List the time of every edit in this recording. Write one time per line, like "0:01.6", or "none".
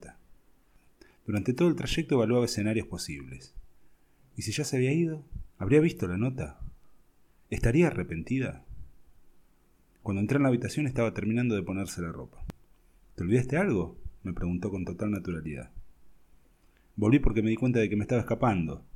0:05.5